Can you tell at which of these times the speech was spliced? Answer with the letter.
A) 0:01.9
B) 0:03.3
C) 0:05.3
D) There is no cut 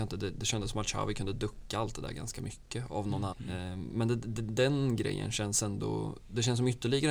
B